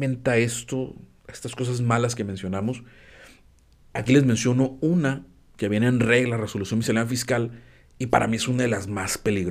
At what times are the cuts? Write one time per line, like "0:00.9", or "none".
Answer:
none